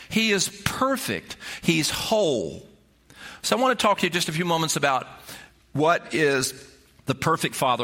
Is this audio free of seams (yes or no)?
no